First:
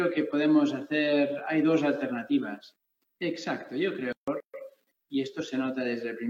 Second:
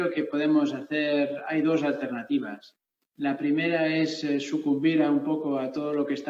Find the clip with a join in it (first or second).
first